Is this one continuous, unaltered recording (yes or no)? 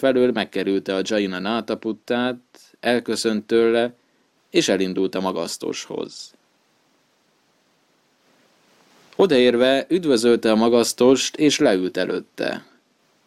yes